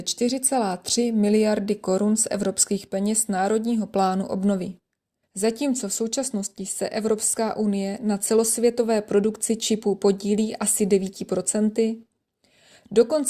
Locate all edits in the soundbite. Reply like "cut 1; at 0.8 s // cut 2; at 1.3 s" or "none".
cut 1; at 5.2 s